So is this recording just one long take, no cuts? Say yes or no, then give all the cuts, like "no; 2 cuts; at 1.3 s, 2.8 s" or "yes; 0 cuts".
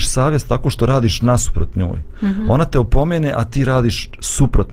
yes; 0 cuts